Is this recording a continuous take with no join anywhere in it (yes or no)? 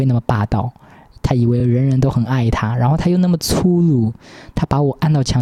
yes